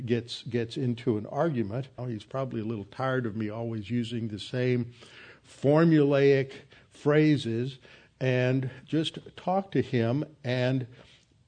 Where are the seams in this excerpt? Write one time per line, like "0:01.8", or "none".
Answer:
0:02.0